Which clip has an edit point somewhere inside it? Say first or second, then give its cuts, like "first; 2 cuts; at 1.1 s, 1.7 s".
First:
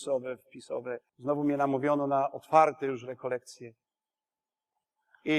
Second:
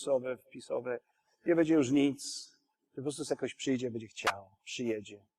first; 1 cut; at 1.1 s